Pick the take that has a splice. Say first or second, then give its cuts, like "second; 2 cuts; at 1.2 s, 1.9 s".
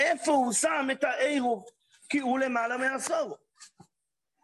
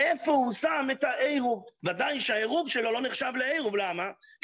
second; 1 cut; at 1.8 s